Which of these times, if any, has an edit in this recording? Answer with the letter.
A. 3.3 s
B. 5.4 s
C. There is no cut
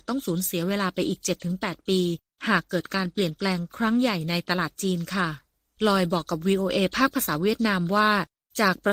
C